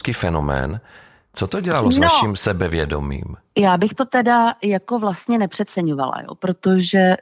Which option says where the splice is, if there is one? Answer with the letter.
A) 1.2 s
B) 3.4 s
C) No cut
C